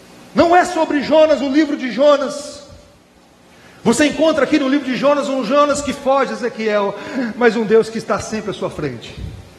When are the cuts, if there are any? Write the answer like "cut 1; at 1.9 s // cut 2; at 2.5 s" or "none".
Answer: cut 1; at 5.9 s